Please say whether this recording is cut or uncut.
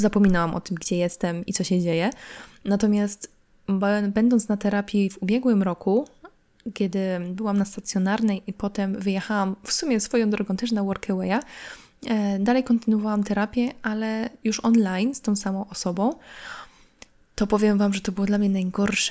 cut